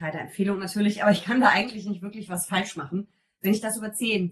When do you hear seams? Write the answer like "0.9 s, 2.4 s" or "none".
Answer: none